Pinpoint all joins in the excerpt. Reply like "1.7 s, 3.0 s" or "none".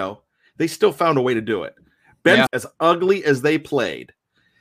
2.5 s